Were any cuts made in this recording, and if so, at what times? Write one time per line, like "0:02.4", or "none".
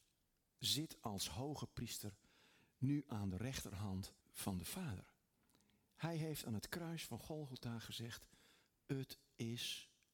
0:04.2